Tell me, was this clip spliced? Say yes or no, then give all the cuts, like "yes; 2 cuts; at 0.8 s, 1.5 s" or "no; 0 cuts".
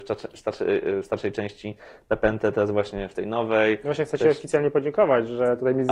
no; 0 cuts